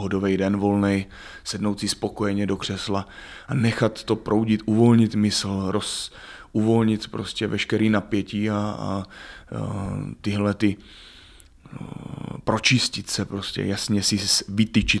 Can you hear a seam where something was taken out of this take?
no; 0 cuts

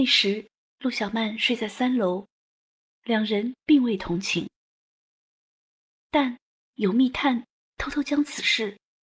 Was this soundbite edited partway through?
no; 0 cuts

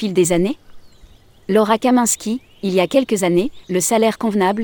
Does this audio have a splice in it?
yes; 1 cut; at 3.6 s

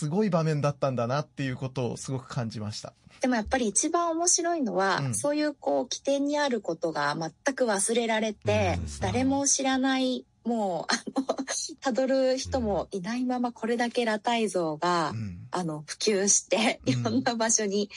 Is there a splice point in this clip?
yes; 2 cuts; at 3.2 s, 9.0 s

